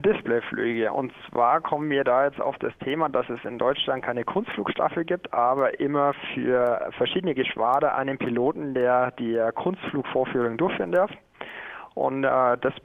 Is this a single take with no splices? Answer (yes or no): yes